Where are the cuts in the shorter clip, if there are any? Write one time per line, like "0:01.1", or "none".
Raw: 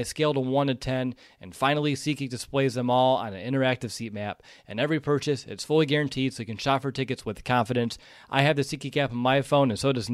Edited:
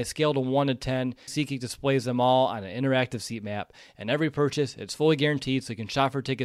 0:01.3